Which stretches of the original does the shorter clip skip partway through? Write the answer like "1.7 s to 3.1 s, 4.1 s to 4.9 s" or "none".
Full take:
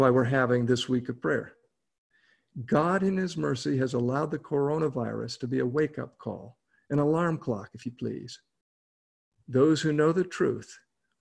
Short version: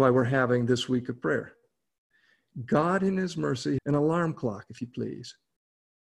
3.8 s to 6.8 s